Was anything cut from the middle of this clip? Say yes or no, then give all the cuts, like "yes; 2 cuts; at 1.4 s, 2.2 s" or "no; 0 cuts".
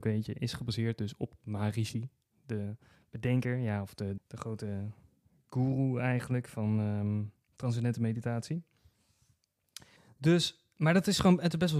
yes; 1 cut; at 4.2 s